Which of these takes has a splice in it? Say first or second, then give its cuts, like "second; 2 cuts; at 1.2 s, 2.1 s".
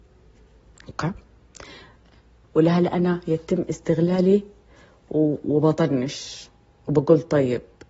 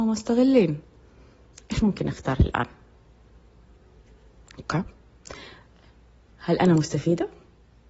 first; 1 cut; at 2.4 s